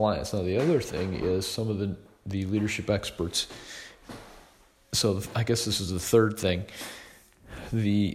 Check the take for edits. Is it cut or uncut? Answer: uncut